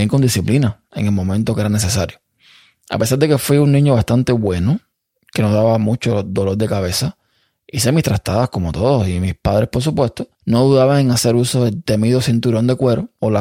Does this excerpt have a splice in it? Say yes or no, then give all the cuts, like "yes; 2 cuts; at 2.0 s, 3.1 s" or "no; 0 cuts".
yes; 1 cut; at 10.3 s